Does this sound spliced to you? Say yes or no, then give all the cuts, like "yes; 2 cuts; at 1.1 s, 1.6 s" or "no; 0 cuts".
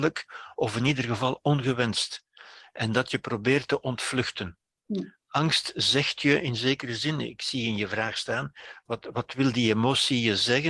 no; 0 cuts